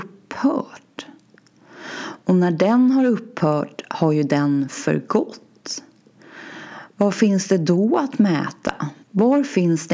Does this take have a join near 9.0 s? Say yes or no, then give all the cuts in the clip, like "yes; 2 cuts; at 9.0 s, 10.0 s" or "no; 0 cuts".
yes; 1 cut; at 9.0 s